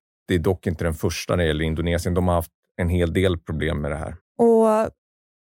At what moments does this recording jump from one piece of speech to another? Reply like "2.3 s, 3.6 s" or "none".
4.2 s